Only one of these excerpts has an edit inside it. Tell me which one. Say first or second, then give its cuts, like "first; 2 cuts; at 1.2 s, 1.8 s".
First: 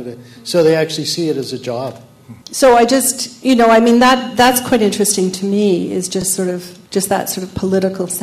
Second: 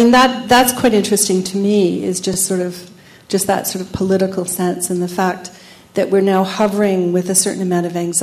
first; 2 cuts; at 2.4 s, 6.9 s